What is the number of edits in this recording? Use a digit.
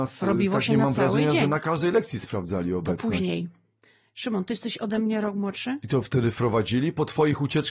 0